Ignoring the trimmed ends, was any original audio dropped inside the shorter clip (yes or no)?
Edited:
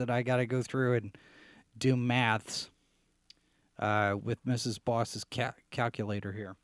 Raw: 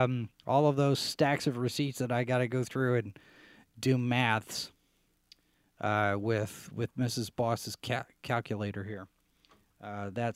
yes